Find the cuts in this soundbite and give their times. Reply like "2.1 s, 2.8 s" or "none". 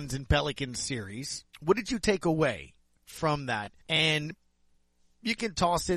1.5 s, 3.8 s